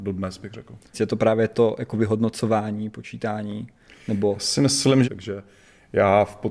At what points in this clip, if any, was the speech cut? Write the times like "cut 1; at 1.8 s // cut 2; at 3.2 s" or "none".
cut 1; at 0.9 s // cut 2; at 5.0 s